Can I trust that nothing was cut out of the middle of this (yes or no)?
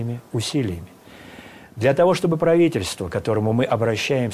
yes